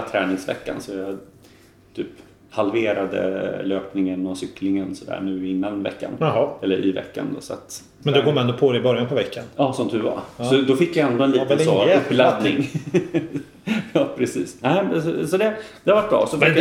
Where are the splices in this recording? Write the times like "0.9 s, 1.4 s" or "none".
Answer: 8.0 s